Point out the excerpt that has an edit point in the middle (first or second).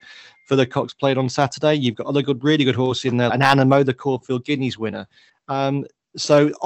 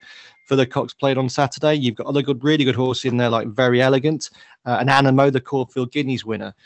first